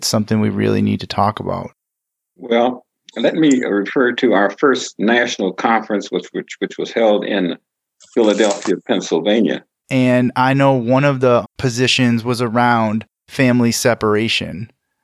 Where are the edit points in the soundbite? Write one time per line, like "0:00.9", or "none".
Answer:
0:09.8
0:11.4